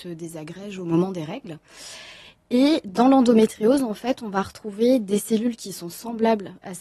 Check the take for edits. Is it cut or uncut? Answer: uncut